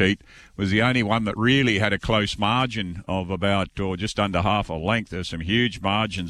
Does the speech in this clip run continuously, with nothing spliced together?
yes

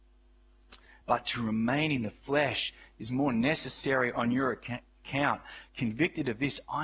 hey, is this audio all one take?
no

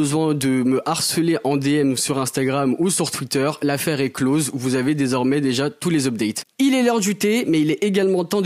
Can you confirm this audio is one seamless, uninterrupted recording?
yes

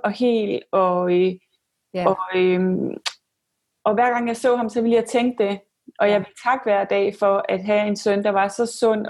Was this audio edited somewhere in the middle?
no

